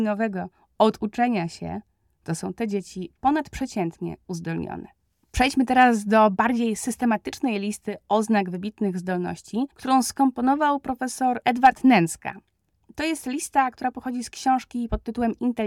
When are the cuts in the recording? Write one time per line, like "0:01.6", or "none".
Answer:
none